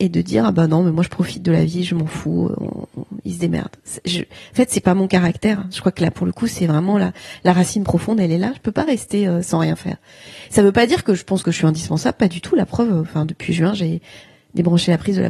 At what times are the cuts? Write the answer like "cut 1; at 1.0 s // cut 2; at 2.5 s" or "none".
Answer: none